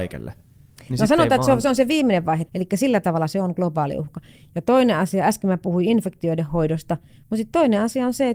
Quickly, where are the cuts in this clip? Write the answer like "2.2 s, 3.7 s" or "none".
2.5 s